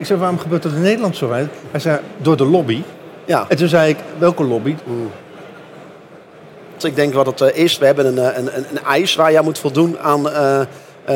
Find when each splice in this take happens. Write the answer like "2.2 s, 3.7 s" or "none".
4.8 s, 6.8 s